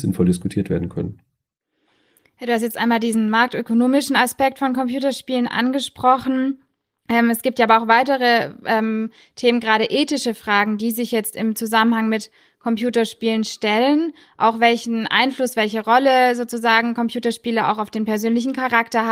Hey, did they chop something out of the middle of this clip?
no; 0 cuts

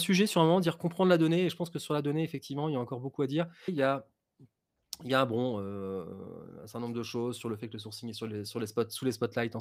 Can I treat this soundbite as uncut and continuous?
no; 1 cut; at 3.7 s

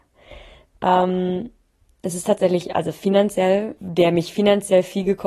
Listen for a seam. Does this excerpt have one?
yes; 1 cut; at 3.8 s

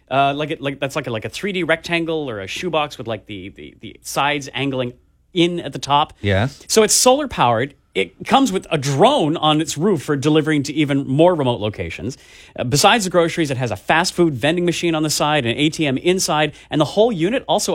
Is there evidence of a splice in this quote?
no; 0 cuts

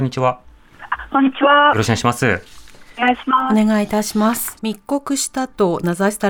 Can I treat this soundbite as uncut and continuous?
no; 1 cut; at 4.6 s

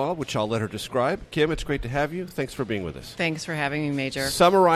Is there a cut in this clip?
no; 0 cuts

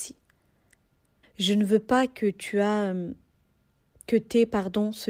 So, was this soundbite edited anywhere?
yes; 1 cut; at 1.2 s

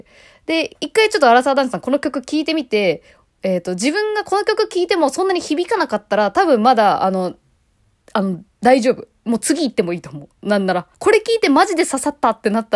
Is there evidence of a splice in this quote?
yes; 1 cut; at 10.9 s

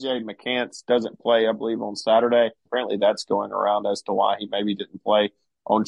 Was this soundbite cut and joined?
yes; 1 cut; at 2.7 s

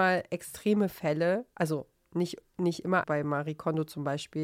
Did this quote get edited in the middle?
yes; 1 cut; at 3.0 s

